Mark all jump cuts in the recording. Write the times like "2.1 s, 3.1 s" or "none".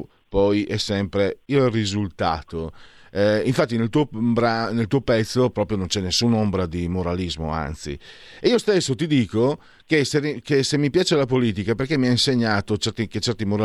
none